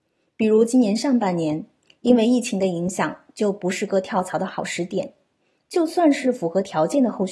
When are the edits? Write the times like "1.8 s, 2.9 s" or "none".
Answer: 5.6 s